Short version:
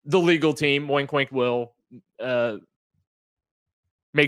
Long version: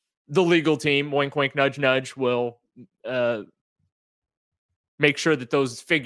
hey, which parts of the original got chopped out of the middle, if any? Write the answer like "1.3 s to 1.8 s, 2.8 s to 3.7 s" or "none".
1.5 s to 2.1 s